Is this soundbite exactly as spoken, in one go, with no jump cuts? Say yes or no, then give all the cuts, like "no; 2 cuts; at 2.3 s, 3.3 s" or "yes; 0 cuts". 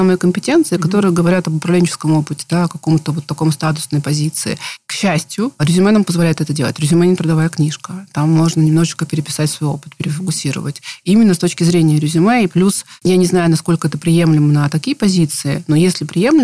yes; 0 cuts